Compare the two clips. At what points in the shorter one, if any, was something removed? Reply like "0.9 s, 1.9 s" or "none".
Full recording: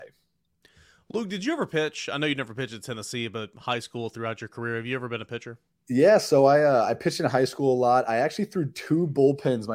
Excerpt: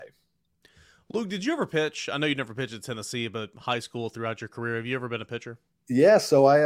none

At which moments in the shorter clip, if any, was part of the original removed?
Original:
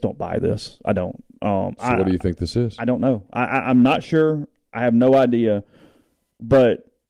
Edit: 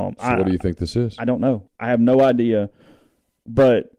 1.7 s

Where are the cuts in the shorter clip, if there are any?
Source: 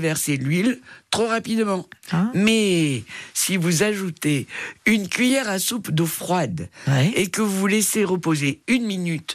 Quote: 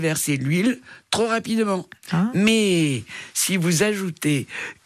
none

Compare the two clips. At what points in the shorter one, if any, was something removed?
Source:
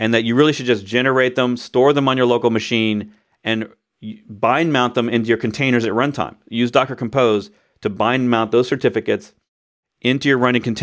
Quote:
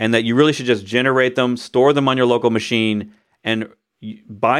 none

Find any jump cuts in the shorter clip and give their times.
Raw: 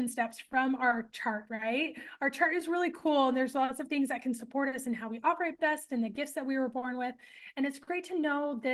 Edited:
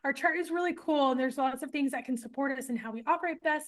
none

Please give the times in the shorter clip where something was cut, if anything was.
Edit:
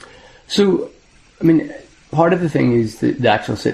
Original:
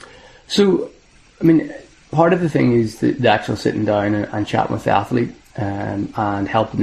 none

